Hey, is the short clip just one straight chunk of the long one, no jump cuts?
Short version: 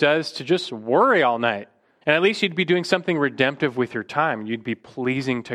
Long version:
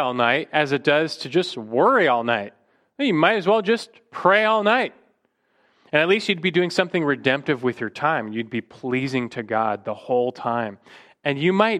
no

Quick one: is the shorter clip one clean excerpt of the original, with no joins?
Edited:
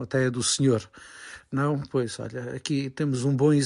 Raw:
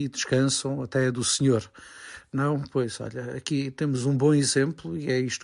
yes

